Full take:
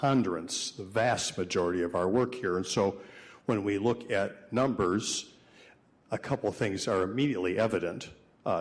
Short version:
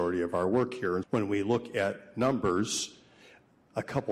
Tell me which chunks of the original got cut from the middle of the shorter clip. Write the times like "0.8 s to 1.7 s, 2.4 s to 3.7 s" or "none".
2.6 s to 3.4 s